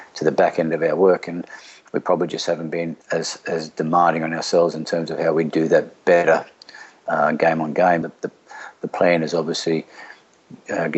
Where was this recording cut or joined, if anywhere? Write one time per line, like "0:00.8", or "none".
0:03.0
0:08.0